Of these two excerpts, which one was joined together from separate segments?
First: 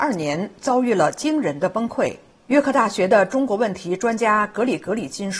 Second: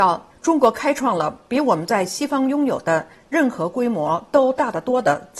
first; 1 cut; at 2.3 s

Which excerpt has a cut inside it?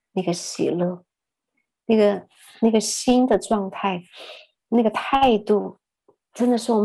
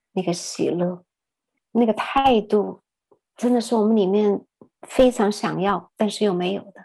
second; 1 cut; at 1.6 s

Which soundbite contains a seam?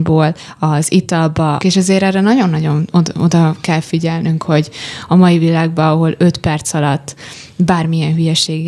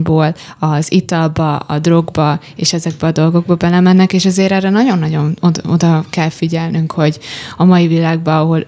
first; 1 cut; at 1.6 s

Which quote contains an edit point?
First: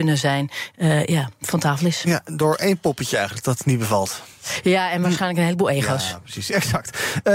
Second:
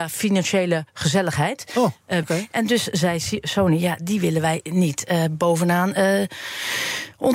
second; 1 cut; at 2.2 s

